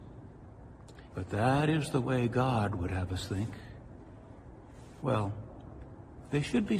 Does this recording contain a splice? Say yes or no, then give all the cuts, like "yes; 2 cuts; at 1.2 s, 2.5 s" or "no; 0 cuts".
yes; 2 cuts; at 1.1 s, 5.0 s